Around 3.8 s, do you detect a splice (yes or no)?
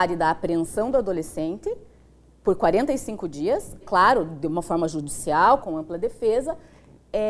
yes